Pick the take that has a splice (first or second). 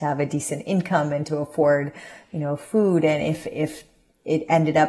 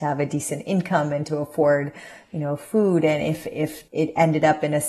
second